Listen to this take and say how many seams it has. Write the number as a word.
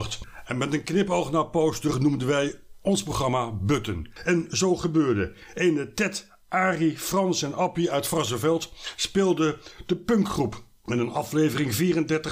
one